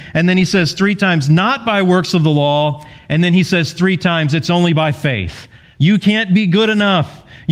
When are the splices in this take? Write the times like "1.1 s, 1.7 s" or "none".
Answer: 5.7 s